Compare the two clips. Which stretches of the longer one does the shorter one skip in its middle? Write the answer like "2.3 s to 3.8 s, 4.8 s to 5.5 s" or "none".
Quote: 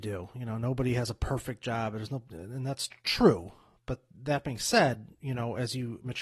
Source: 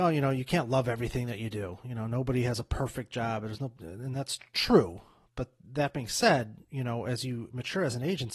none